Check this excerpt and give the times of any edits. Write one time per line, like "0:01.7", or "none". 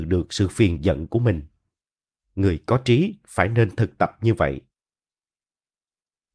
none